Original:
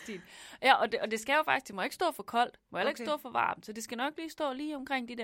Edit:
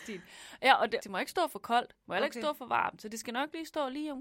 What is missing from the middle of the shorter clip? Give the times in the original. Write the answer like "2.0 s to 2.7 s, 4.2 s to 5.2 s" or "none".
1.0 s to 1.6 s